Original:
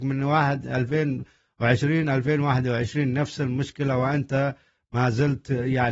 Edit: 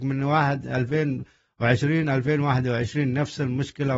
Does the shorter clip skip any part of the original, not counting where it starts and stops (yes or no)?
no